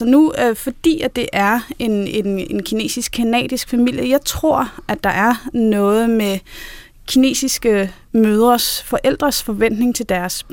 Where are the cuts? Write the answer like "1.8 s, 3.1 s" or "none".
none